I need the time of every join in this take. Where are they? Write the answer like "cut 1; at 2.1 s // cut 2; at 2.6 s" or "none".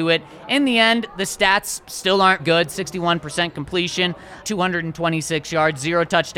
cut 1; at 2.4 s // cut 2; at 4.4 s